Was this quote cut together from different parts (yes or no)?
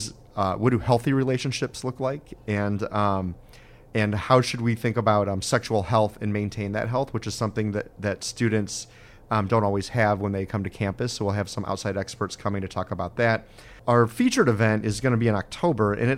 no